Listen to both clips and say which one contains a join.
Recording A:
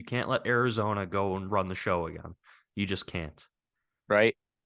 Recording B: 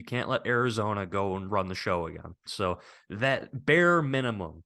B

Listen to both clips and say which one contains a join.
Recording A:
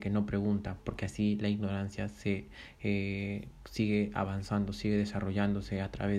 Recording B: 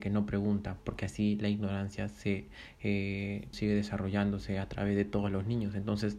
B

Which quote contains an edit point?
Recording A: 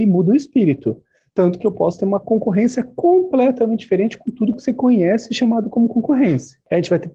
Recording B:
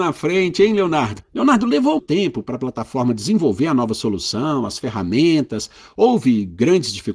B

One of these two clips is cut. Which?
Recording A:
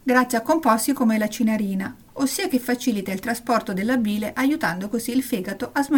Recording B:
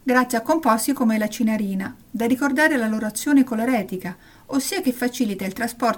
A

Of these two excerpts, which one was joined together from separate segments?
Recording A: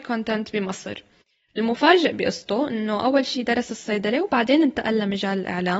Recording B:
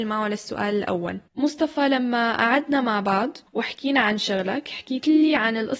B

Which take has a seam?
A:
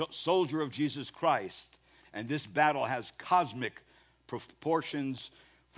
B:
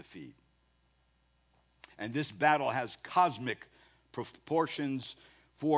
A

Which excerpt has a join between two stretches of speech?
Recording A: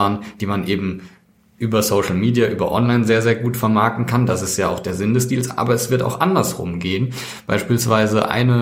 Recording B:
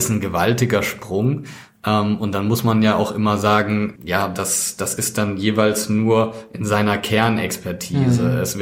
B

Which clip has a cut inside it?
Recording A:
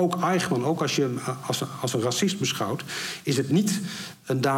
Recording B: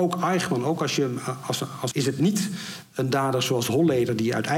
B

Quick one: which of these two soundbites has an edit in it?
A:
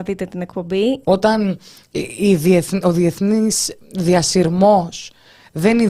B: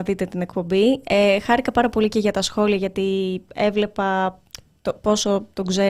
A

